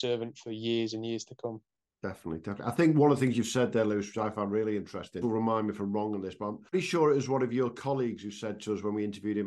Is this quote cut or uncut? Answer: cut